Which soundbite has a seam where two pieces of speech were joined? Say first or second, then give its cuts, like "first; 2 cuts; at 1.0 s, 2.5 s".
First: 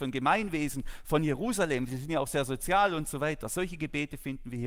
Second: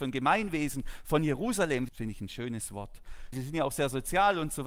second; 2 cuts; at 1.9 s, 3.3 s